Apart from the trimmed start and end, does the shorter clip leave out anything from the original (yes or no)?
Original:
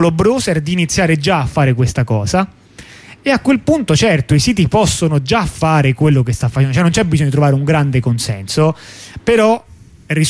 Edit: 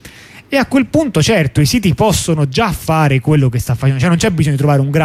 no